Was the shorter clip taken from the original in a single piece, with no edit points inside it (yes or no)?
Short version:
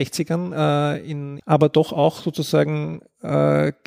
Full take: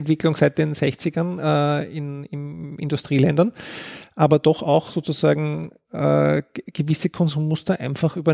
no